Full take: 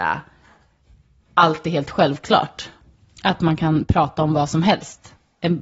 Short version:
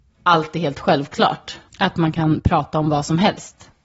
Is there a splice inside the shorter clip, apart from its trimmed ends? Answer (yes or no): yes